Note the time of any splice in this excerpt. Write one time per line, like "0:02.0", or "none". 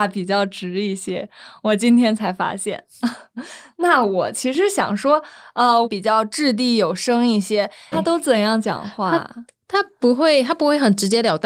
0:05.8
0:07.9